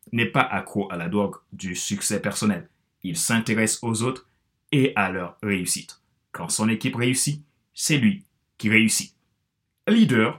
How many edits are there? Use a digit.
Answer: 0